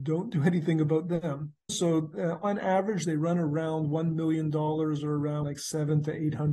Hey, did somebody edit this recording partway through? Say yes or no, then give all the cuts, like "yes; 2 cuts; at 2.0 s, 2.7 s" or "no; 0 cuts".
yes; 2 cuts; at 1.7 s, 5.4 s